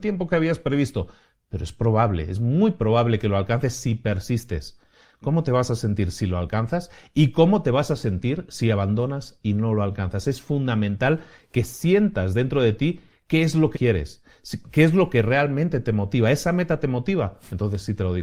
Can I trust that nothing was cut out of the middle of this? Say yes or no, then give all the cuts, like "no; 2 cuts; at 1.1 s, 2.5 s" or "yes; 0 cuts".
no; 1 cut; at 13.7 s